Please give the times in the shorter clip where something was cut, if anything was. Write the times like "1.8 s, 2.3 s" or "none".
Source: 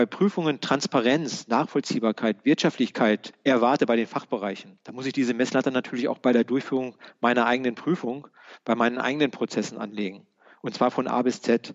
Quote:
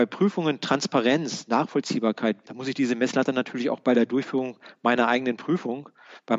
2.4 s